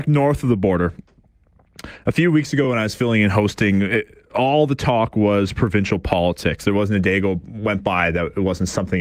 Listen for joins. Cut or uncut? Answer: uncut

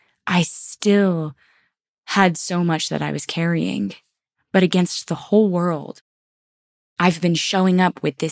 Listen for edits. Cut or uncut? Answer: cut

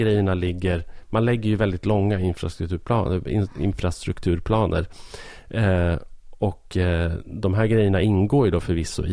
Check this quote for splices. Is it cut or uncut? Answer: uncut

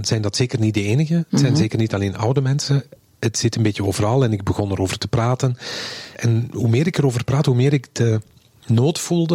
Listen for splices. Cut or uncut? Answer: uncut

